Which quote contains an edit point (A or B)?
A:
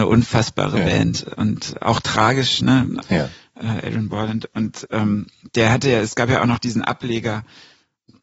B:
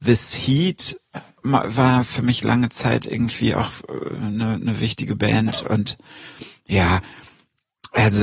A